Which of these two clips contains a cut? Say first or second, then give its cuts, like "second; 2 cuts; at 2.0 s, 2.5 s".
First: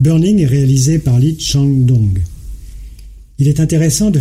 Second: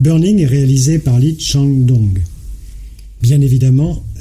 second; 1 cut; at 3.2 s